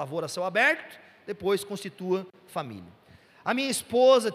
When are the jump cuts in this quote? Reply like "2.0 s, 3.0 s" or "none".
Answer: none